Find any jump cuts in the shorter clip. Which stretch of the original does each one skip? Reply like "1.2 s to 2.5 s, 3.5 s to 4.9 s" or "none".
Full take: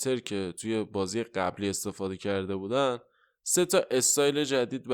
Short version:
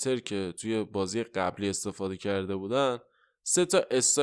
none